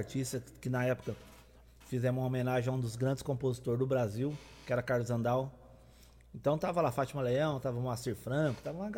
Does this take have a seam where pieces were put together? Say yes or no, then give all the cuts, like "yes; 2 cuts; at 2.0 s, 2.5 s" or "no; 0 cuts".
no; 0 cuts